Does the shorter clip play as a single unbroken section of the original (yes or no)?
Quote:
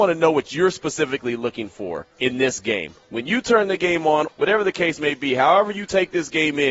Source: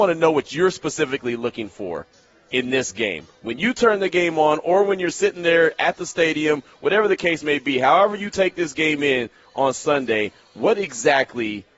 no